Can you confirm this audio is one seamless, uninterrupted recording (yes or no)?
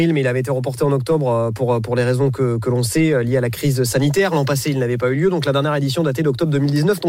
yes